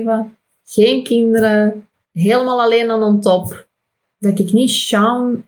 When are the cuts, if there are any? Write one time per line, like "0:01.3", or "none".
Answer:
0:01.9
0:04.0